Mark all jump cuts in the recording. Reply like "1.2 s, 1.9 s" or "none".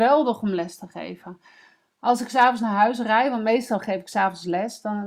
none